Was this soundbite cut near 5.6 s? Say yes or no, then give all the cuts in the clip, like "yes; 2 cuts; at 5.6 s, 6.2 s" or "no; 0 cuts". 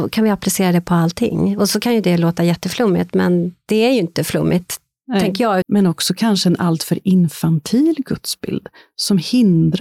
yes; 1 cut; at 5.6 s